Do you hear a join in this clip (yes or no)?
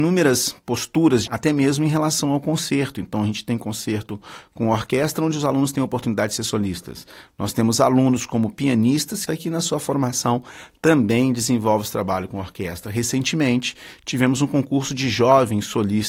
yes